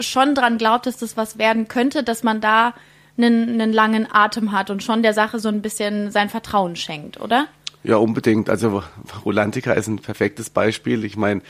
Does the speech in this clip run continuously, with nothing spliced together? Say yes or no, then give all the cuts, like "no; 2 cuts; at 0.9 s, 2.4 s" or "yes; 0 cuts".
yes; 0 cuts